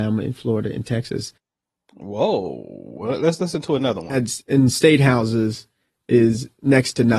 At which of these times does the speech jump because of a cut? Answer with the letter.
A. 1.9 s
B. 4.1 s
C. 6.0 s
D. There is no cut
D